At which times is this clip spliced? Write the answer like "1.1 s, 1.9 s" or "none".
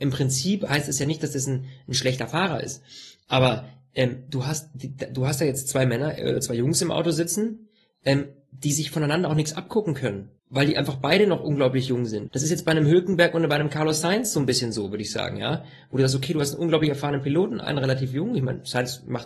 10.4 s, 12.3 s

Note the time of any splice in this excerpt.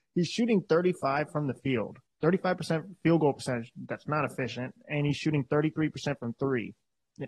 none

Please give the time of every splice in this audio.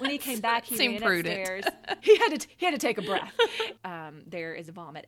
2.0 s, 3.8 s

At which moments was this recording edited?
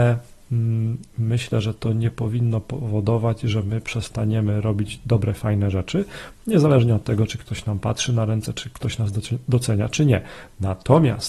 none

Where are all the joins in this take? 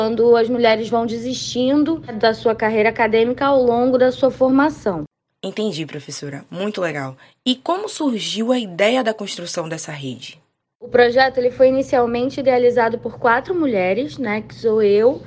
none

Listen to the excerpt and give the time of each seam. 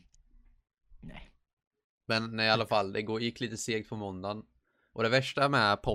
none

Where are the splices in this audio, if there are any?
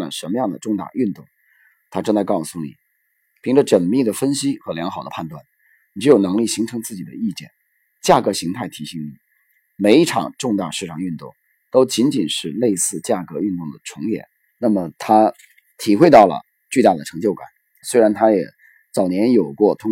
14.5 s, 17.8 s

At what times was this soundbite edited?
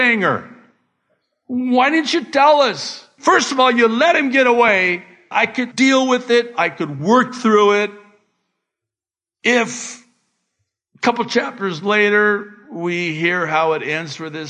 5.3 s

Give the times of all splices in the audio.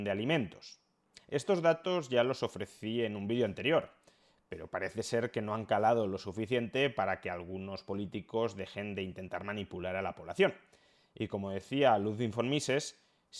none

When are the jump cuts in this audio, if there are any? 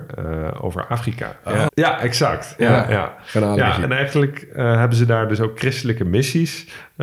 1.7 s, 3.8 s

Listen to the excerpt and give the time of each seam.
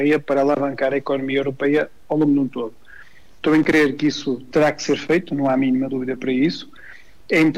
none

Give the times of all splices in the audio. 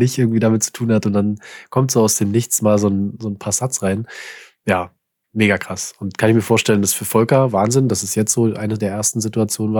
none

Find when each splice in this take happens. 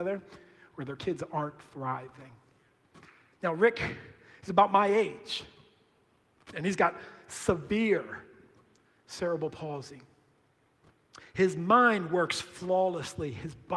3.3 s

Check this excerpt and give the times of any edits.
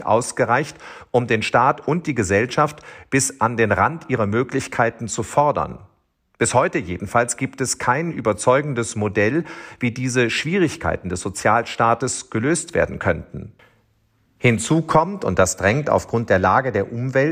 none

